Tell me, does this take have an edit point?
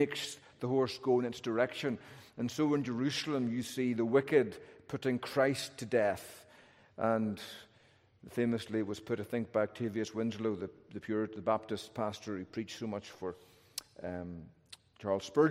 no; 0 cuts

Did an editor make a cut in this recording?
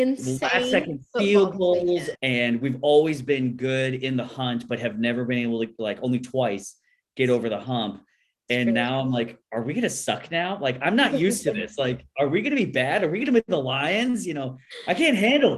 yes; 1 cut; at 2.1 s

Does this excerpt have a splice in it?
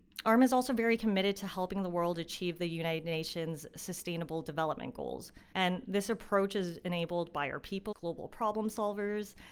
yes; 2 cuts; at 5.5 s, 7.9 s

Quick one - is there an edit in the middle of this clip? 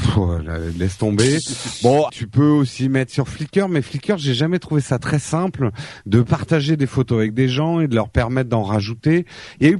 yes; 1 cut; at 2.1 s

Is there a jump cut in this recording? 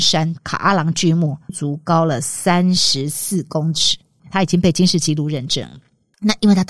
yes; 1 cut; at 1.5 s

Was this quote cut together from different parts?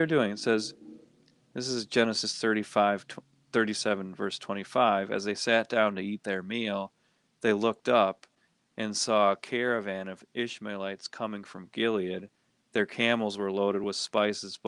no; 0 cuts

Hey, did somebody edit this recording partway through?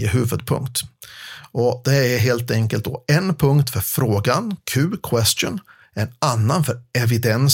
no; 0 cuts

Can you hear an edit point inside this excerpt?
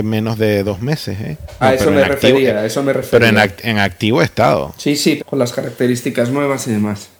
yes; 2 cuts; at 1.6 s, 5.2 s

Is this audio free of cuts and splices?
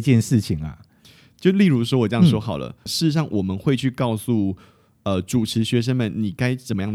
no; 1 cut; at 2.9 s

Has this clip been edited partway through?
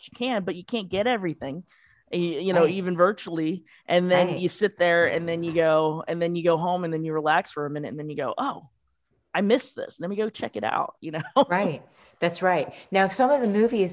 no; 0 cuts

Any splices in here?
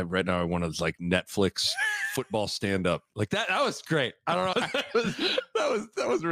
yes; 1 cut; at 4.5 s

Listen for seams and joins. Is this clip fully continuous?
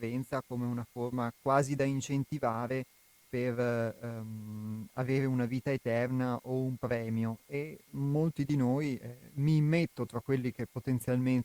no; 1 cut; at 9.3 s

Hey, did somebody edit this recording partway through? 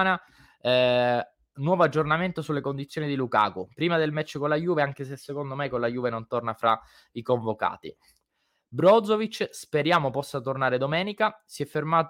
no; 0 cuts

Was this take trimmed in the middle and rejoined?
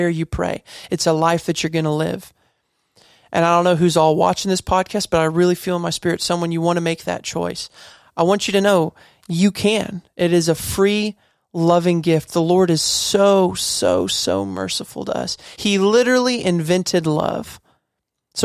yes; 1 cut; at 15.5 s

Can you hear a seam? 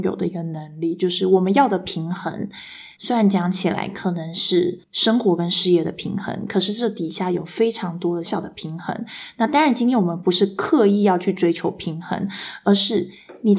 yes; 2 cuts; at 2.9 s, 8.2 s

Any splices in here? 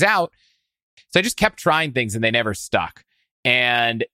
yes; 1 cut; at 1.0 s

